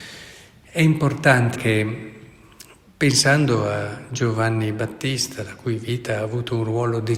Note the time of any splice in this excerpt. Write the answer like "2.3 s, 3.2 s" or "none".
1.6 s